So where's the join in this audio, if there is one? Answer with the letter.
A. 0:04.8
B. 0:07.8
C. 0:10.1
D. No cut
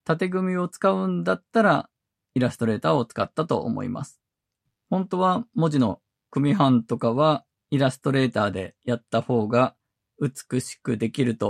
A